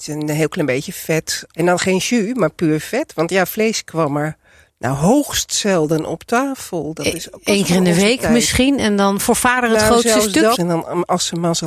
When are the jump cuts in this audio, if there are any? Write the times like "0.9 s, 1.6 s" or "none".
1.5 s, 10.6 s